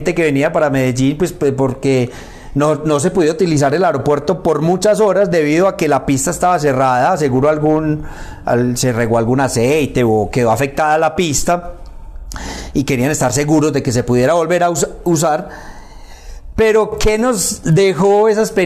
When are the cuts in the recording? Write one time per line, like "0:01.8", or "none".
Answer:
none